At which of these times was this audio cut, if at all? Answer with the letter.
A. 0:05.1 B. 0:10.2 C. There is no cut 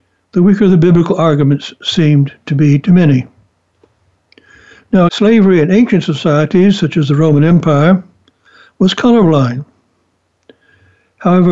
A